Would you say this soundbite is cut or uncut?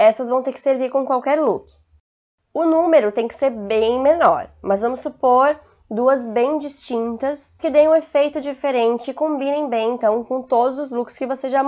uncut